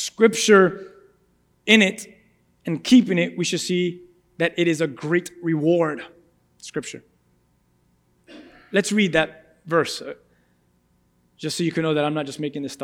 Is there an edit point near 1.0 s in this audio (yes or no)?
no